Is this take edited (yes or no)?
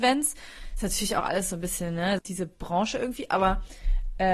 yes